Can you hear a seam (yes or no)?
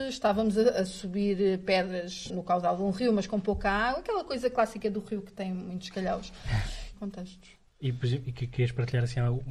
yes